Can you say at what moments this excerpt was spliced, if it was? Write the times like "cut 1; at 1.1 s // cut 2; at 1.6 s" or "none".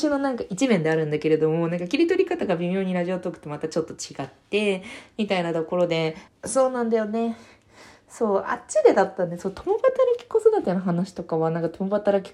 cut 1; at 6.3 s